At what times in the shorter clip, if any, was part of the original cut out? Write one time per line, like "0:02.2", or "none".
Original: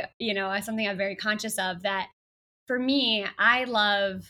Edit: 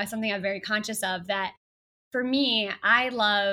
none